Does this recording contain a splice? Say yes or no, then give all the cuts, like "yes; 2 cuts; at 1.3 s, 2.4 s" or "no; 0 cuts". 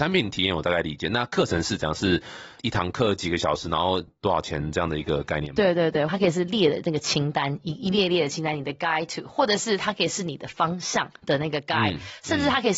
yes; 1 cut; at 6.1 s